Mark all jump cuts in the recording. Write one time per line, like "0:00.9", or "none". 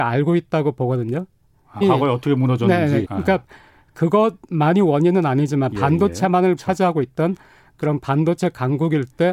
0:01.8
0:03.0
0:06.6